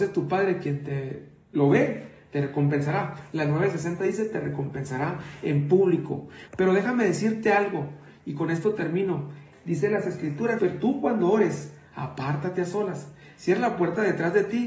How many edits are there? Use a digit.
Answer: 3